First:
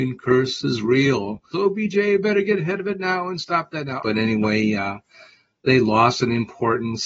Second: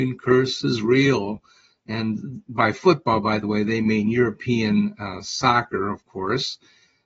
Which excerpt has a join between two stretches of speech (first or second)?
first